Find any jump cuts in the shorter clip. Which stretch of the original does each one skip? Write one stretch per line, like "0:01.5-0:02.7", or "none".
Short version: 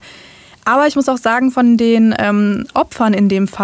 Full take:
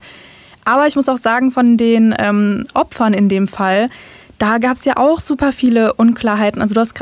none

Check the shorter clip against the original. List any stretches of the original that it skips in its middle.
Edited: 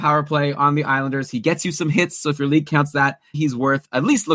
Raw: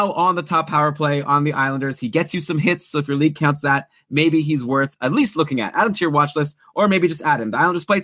0:04.0-0:04.4

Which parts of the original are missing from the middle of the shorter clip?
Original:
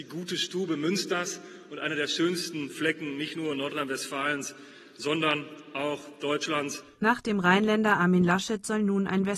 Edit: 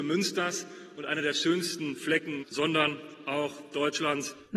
0:03.2-0:04.9

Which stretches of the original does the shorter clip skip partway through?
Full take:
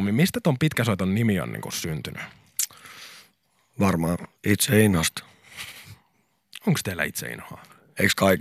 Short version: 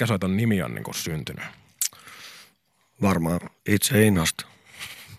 none

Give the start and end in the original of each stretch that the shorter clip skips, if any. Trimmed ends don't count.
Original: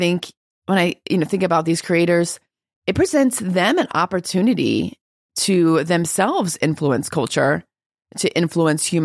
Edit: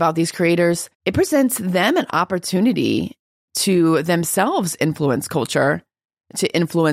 0:02.4-0:02.8

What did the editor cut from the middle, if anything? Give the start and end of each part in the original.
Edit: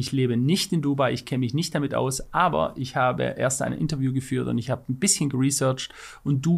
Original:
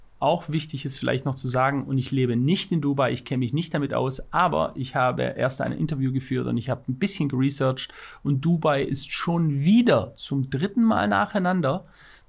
none

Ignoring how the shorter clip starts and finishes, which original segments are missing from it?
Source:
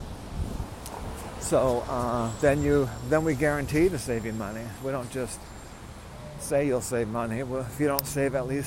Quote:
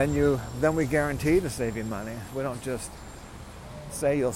none

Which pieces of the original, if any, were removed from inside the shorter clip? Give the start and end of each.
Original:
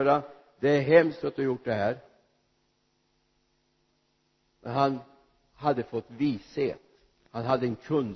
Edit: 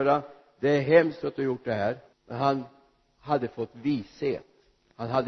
0:02.1-0:04.5

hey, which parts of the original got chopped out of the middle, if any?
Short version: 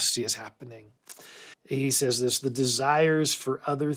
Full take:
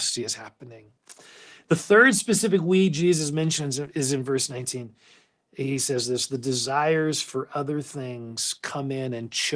0:01.5-0:05.4

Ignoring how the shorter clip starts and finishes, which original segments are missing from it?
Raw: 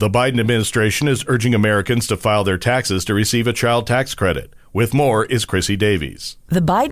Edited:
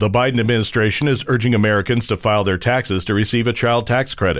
none

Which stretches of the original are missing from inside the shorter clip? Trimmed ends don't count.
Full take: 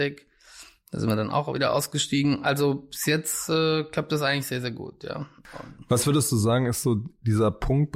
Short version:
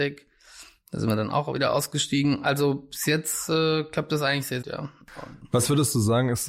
0:04.6-0:05.0

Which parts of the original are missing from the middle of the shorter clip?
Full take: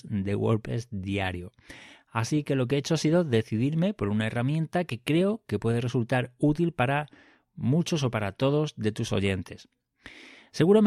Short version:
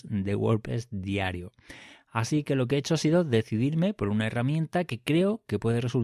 none

